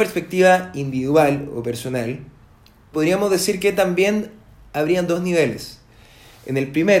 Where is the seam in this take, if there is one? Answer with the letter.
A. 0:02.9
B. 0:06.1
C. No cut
A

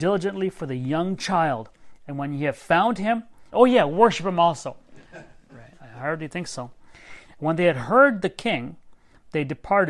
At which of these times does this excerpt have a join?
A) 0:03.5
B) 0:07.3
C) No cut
A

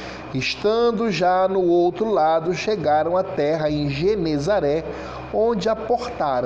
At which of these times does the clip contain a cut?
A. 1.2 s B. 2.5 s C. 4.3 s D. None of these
D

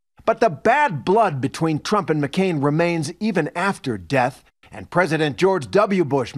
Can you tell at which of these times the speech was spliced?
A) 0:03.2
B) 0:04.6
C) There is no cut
B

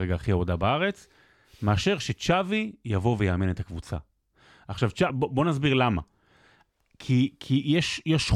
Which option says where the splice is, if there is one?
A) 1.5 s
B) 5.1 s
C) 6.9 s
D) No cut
D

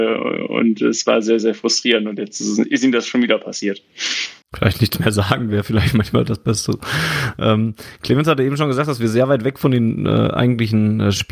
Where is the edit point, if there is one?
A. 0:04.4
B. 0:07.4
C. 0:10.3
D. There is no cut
A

